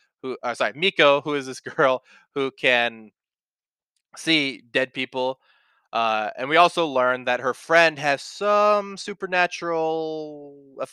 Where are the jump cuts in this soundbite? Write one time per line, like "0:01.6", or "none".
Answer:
none